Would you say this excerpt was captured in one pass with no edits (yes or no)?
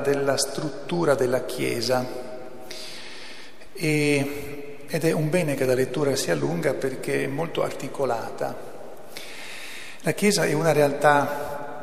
yes